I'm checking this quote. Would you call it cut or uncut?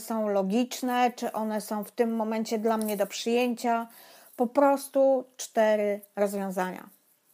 uncut